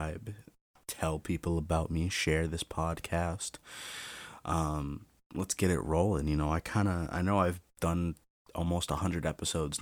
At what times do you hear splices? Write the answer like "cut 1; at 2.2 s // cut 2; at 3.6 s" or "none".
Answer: none